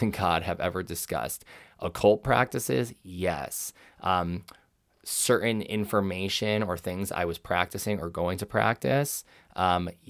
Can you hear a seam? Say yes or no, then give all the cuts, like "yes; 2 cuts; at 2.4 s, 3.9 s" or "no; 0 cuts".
no; 0 cuts